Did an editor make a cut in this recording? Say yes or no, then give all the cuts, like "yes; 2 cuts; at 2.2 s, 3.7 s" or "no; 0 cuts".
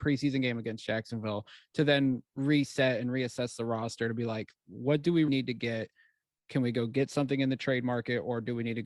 yes; 1 cut; at 5.3 s